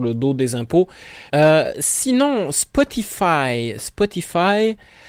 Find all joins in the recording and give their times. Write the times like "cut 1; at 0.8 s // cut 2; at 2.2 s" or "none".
cut 1; at 1.3 s